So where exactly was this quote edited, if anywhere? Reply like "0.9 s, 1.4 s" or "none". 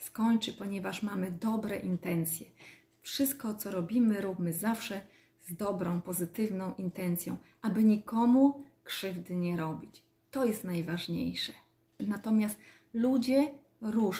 12.0 s